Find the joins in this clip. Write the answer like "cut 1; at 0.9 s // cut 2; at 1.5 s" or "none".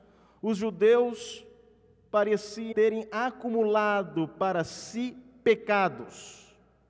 cut 1; at 2.7 s